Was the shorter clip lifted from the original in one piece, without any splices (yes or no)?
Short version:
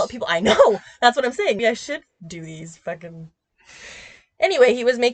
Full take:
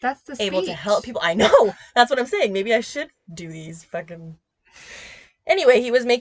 no